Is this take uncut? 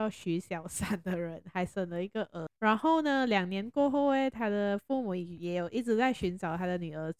no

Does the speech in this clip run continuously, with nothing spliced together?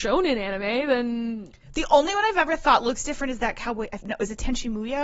no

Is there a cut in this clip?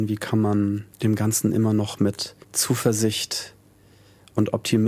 yes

